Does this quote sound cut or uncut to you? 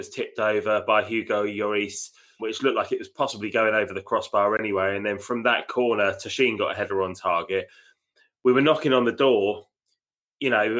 cut